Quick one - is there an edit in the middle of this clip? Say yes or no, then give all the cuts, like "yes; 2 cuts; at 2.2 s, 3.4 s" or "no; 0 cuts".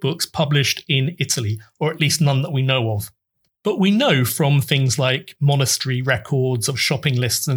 no; 0 cuts